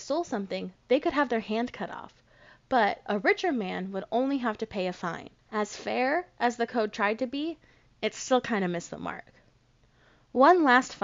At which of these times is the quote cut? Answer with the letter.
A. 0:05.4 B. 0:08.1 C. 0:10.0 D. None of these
A